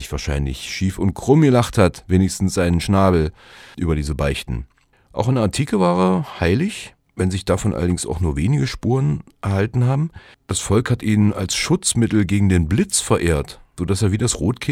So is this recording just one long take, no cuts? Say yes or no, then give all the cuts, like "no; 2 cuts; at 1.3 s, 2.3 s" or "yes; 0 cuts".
yes; 0 cuts